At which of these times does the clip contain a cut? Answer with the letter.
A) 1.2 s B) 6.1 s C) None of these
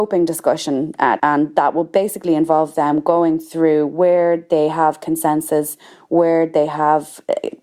A